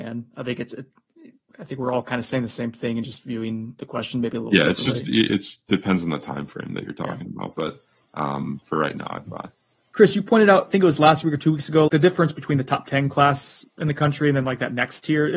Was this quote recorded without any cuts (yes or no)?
no